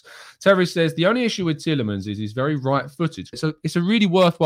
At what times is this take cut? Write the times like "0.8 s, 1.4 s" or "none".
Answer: 3.3 s